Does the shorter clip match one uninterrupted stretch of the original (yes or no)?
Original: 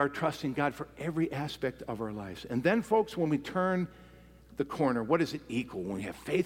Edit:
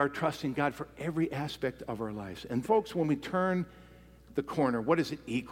no